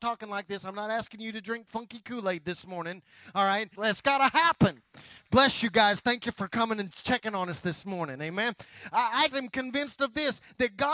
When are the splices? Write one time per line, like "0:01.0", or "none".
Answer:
0:03.8
0:09.3